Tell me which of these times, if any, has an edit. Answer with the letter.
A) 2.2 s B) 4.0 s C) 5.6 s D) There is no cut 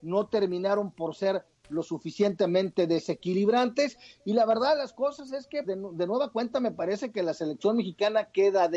C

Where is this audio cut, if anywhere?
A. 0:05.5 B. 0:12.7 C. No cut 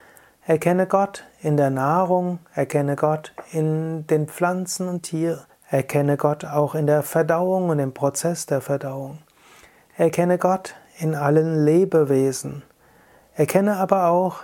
A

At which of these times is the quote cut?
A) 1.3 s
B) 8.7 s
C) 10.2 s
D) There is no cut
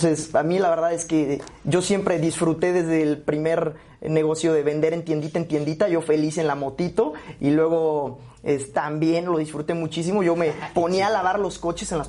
B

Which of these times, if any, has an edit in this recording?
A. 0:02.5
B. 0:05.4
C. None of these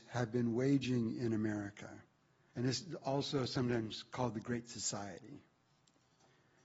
A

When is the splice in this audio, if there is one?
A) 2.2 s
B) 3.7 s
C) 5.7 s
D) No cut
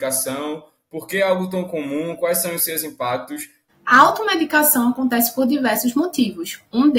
B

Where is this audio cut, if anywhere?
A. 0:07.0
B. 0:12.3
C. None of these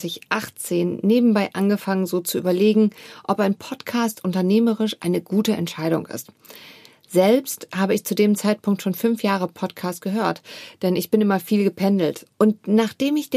B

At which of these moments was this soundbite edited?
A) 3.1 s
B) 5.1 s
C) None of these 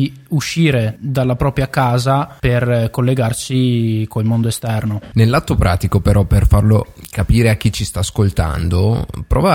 C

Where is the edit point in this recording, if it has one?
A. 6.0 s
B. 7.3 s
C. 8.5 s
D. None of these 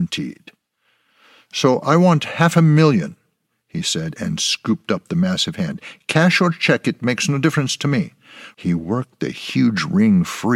C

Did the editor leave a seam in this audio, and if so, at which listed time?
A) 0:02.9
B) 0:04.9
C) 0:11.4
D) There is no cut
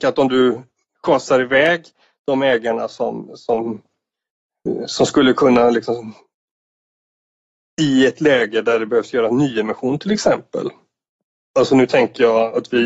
D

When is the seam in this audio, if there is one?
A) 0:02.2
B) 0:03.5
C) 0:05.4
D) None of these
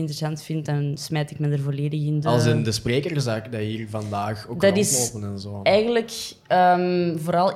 A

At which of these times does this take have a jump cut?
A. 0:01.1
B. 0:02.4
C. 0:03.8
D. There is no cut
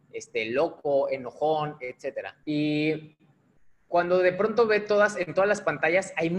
B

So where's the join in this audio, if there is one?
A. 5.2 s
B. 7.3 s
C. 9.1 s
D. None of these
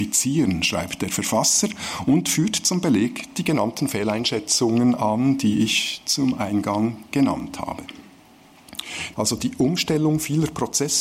C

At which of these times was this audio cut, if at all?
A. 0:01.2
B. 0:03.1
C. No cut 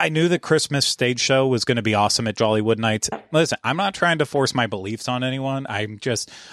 B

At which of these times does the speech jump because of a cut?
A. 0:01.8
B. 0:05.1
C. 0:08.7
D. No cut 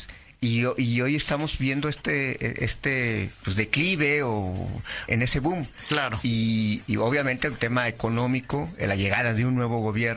B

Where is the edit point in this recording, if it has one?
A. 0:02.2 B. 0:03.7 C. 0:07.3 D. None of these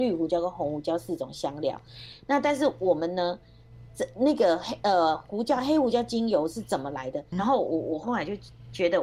C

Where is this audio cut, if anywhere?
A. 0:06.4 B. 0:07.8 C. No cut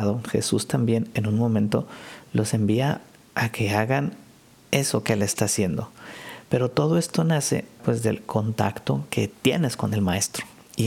B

